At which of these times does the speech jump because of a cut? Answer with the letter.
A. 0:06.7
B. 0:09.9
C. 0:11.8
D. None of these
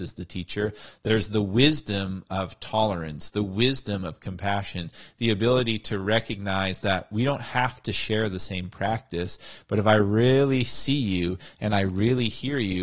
D